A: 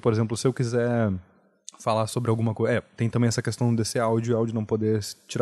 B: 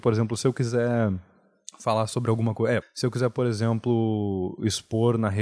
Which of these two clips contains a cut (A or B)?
B